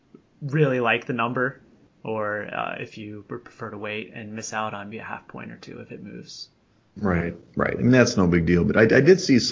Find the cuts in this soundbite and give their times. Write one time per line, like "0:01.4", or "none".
0:04.9